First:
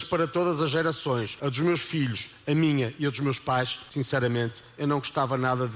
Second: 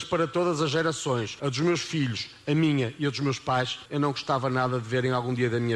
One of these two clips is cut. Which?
second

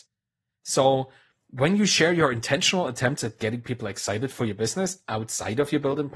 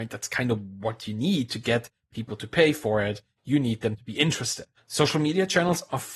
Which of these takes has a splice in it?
second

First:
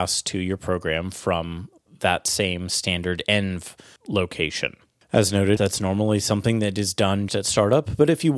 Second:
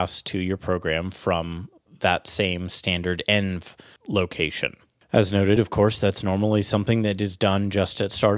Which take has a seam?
first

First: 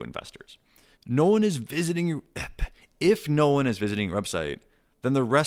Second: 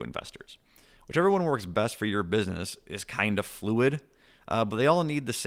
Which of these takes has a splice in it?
first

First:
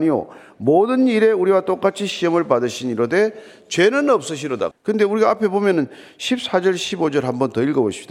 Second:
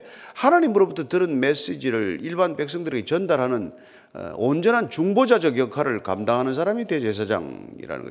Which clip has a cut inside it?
first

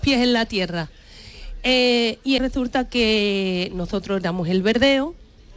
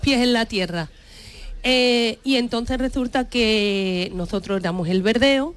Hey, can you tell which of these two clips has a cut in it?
first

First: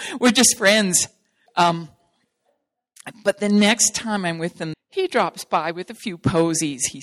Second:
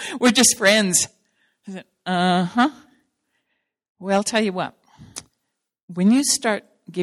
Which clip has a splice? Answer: first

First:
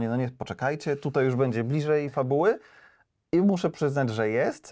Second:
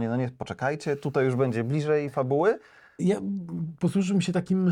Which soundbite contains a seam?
second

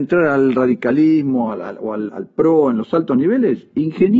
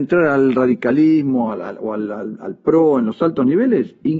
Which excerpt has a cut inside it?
first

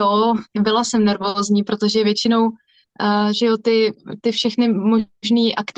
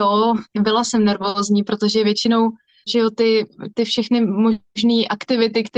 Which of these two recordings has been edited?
second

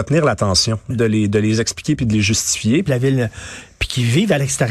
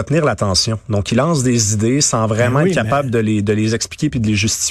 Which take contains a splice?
first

